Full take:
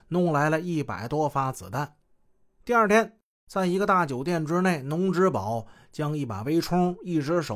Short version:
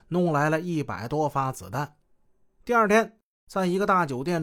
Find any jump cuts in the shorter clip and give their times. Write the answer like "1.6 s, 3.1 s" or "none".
none